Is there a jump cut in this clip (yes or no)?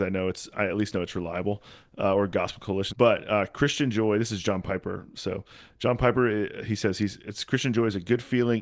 yes